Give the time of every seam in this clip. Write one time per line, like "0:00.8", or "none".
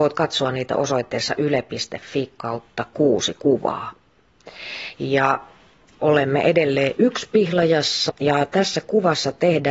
0:04.9
0:08.1